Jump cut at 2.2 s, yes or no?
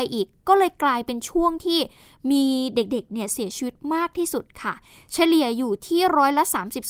no